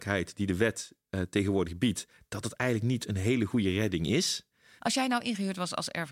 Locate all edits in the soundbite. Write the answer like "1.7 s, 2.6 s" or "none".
4.8 s